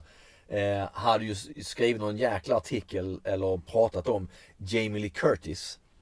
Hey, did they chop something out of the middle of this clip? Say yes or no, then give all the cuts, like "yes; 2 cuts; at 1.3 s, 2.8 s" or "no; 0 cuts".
no; 0 cuts